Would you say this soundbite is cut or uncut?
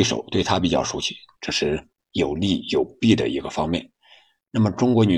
cut